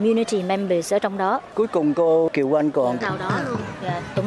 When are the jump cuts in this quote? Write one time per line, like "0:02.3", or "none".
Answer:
0:03.0